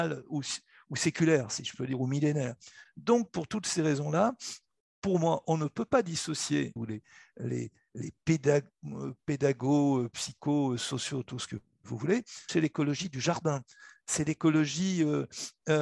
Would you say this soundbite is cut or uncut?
cut